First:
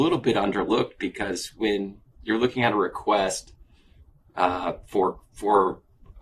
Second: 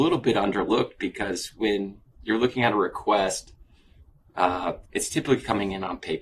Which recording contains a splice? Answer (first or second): second